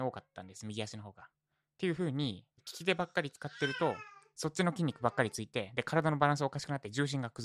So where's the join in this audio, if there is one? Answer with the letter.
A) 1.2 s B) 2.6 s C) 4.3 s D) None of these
B